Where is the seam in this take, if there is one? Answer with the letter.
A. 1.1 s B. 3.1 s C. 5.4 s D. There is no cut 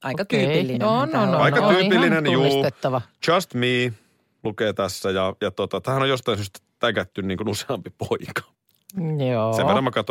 D